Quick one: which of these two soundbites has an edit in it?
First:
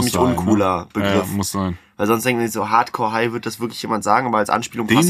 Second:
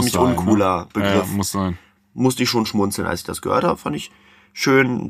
second; 1 cut; at 1.9 s

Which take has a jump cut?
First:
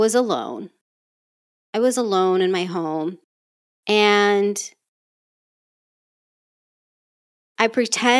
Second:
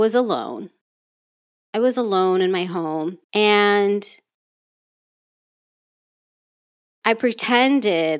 second; 1 cut; at 3.2 s

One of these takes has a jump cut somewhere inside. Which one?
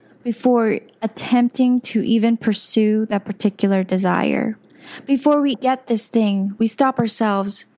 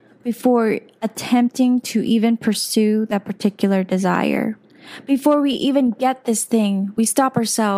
first; 1 cut; at 5.5 s

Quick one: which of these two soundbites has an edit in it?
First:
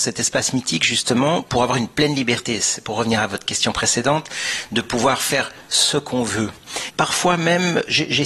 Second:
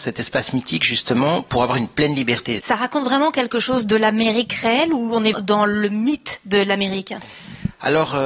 second; 2 cuts; at 2.6 s, 5.3 s

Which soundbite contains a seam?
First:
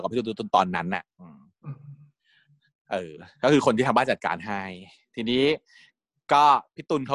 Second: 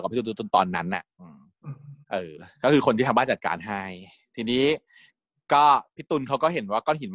second; 1 cut; at 2.0 s

